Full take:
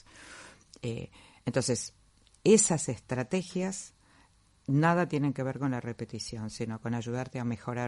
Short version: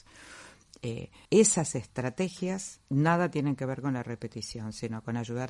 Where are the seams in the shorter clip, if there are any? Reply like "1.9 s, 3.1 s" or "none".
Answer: 1.3 s, 2.8 s